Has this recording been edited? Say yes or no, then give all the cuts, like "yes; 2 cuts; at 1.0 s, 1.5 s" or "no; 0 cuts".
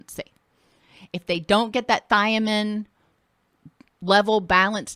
no; 0 cuts